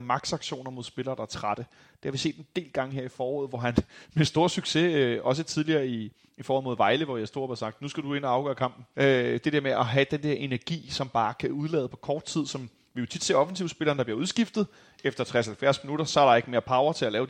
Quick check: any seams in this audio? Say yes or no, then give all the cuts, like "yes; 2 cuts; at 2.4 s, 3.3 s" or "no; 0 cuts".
yes; 1 cut; at 8.9 s